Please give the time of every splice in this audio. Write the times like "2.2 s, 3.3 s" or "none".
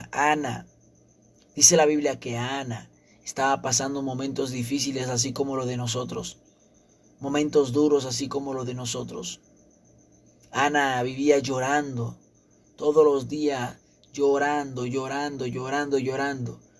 none